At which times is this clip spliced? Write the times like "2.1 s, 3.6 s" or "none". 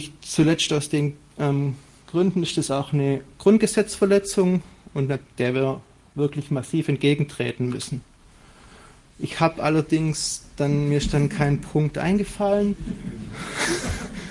5.2 s, 9.0 s